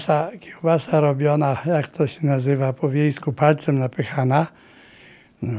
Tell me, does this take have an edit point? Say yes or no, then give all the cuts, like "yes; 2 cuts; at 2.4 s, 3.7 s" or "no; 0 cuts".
no; 0 cuts